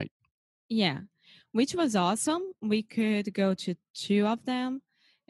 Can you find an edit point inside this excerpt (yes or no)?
no